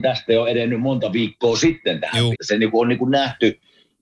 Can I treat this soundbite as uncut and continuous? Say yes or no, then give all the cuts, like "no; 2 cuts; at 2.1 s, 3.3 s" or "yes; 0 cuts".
no; 1 cut; at 2.3 s